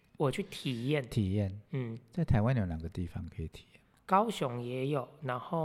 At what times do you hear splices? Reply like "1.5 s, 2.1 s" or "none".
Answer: none